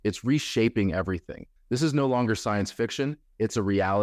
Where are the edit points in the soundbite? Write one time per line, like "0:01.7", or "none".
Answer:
0:01.6